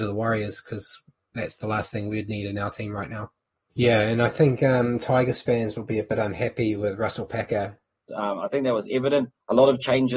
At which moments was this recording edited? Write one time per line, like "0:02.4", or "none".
0:03.7
0:08.1